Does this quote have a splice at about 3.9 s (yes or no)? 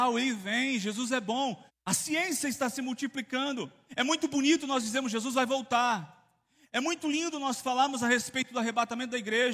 yes